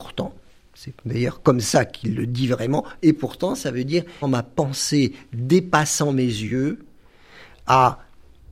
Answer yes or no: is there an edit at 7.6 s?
no